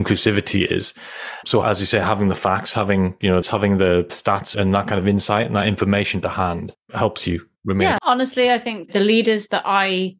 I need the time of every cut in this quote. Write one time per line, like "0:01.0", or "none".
0:03.4
0:08.0